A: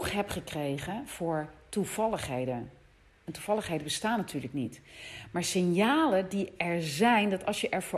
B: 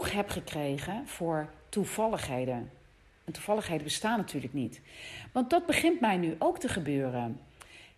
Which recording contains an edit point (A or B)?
B